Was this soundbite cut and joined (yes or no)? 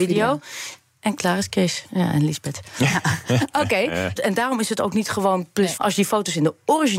yes